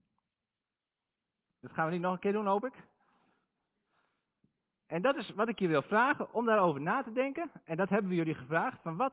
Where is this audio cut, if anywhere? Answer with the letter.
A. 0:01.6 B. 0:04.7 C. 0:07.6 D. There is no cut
A